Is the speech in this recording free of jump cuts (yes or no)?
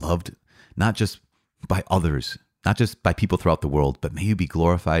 yes